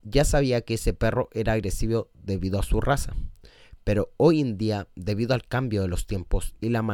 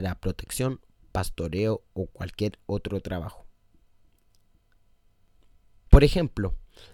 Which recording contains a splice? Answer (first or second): second